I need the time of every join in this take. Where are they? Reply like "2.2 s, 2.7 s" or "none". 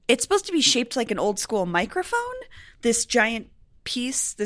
none